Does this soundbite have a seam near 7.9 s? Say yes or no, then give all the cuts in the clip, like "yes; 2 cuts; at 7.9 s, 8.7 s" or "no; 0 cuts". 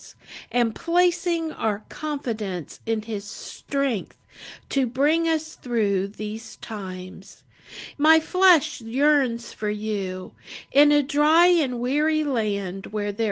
yes; 1 cut; at 7.9 s